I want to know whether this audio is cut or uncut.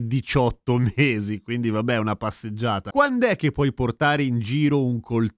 uncut